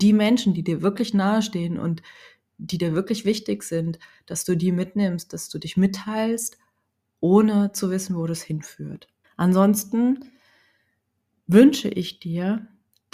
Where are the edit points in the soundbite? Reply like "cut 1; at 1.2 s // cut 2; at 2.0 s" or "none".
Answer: cut 1; at 9.2 s